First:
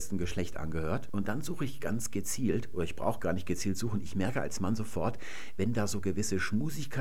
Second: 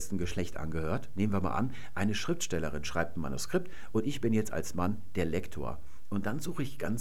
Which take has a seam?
first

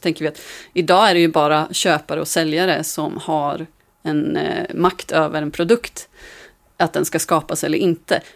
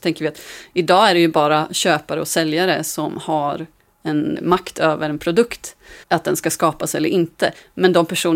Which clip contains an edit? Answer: second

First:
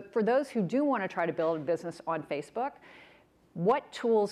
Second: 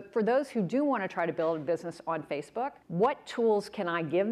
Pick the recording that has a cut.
second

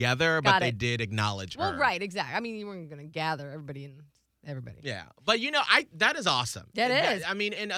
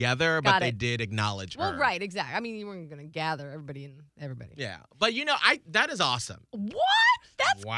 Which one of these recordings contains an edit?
second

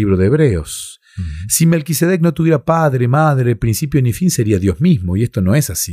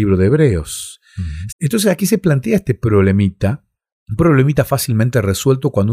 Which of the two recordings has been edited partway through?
second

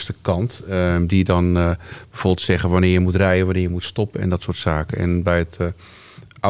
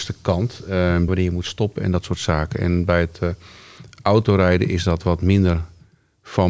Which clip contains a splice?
second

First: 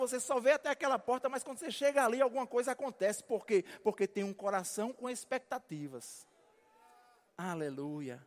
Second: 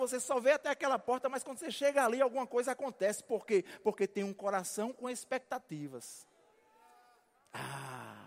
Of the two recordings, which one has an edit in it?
first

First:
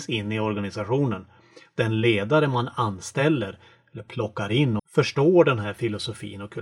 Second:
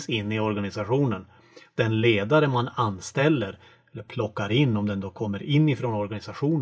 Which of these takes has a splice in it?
first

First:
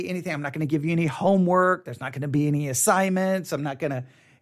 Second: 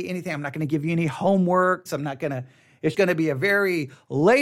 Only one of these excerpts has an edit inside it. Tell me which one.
second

